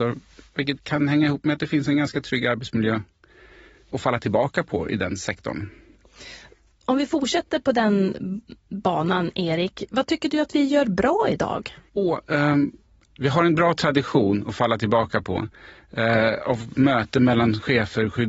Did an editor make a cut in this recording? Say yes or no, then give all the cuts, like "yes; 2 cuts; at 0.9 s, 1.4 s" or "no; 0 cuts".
no; 0 cuts